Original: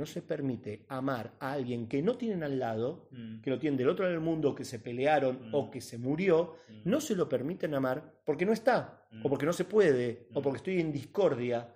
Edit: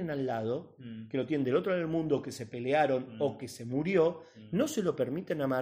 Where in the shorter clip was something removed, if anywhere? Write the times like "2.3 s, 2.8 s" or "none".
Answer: none